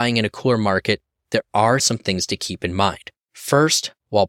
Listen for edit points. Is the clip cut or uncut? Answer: cut